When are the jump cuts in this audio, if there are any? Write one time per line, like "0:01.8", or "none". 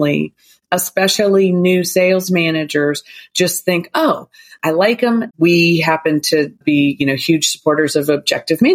0:05.3
0:06.6